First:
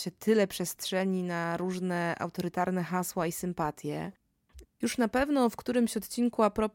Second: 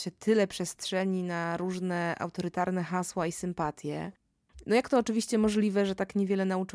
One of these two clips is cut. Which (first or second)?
first